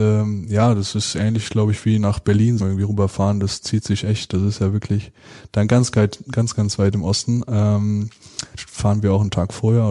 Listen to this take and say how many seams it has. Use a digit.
2